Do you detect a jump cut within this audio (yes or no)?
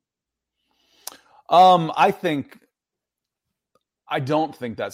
no